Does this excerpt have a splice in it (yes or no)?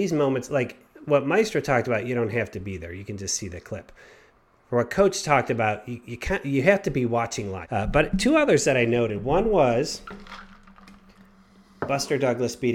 yes